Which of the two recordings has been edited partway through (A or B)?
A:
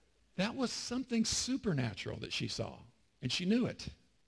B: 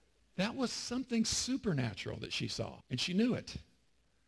B